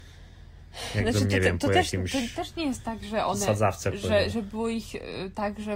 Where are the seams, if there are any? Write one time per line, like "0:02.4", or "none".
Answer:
none

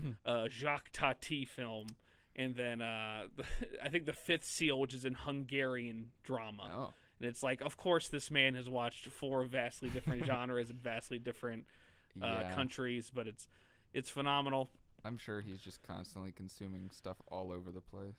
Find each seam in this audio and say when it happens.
none

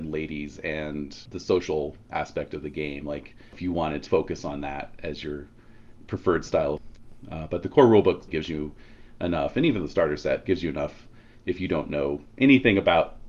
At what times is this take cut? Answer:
0:04.1
0:08.3

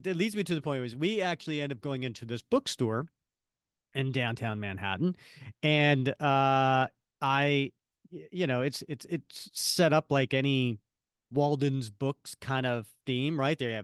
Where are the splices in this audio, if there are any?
none

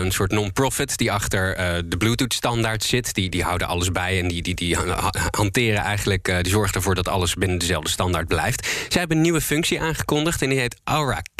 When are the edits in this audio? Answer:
none

